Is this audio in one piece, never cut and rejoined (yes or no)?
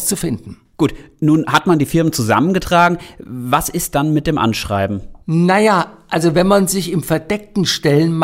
yes